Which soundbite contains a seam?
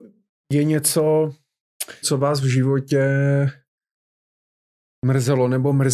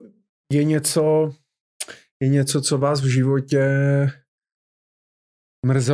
first; 1 cut; at 2.0 s

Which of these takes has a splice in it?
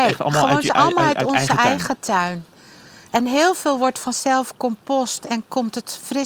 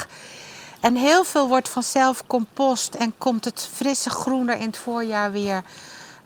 first; 1 cut; at 3.1 s

